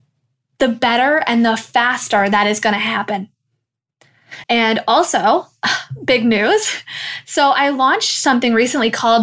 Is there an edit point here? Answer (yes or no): yes